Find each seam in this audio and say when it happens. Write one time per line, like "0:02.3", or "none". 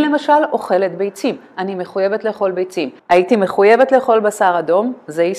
0:03.0